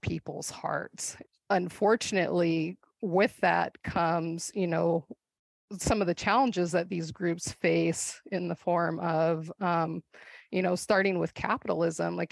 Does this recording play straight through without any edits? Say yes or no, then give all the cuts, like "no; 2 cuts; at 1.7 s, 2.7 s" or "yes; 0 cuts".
yes; 0 cuts